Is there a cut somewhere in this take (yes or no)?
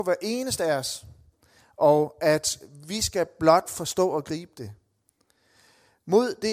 no